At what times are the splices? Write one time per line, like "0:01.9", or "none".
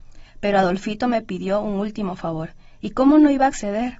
none